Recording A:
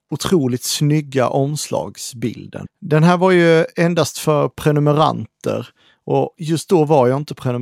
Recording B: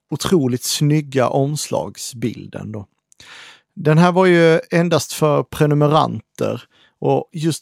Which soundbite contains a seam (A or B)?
A